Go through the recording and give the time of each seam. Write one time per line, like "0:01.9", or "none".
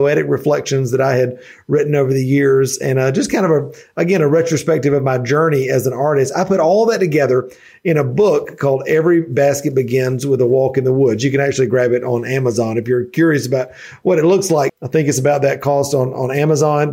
0:14.7